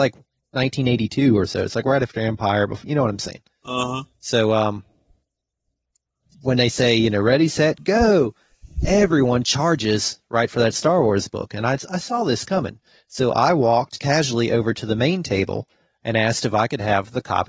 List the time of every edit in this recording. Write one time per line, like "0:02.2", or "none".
none